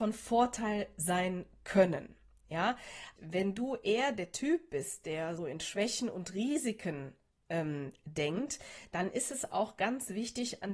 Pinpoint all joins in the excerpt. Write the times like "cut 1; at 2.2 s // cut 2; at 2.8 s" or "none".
cut 1; at 3.2 s // cut 2; at 5.4 s